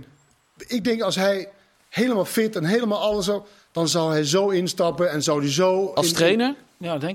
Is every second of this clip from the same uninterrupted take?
yes; 0 cuts

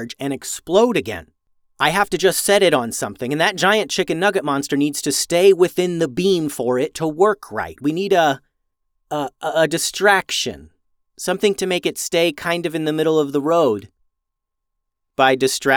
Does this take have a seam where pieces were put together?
no; 0 cuts

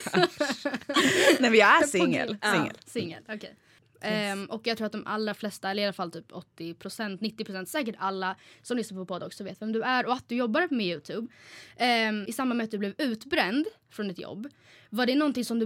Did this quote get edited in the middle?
yes; 2 cuts; at 3.8 s, 12.3 s

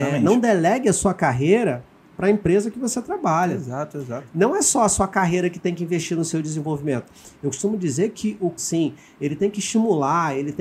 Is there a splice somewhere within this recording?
yes; 1 cut; at 8.6 s

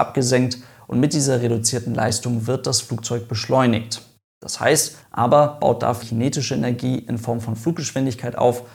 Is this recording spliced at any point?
yes; 2 cuts; at 5.0 s, 6.0 s

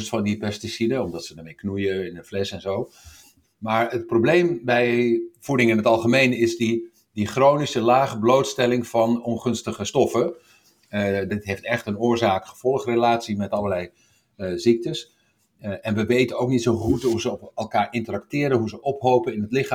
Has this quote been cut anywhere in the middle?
yes; 2 cuts; at 3.4 s, 11.3 s

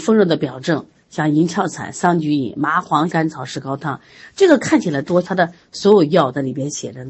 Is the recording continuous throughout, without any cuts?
no; 2 cuts; at 3.1 s, 5.2 s

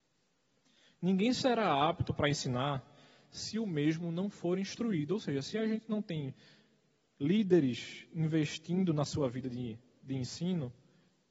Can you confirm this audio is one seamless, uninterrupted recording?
yes; 0 cuts

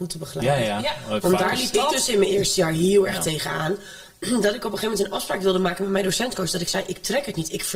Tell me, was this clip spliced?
no; 0 cuts

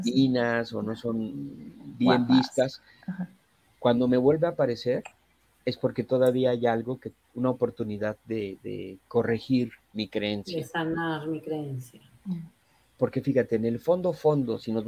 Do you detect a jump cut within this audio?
no; 0 cuts

